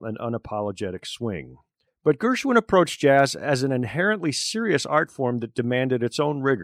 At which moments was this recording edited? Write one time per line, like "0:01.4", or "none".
0:01.9